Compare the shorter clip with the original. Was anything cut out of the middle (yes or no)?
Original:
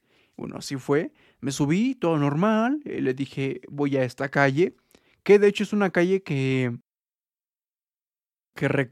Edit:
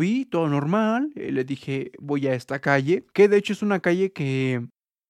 yes